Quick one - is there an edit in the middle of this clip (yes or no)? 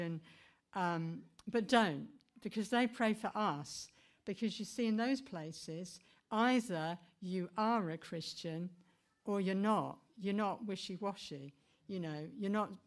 no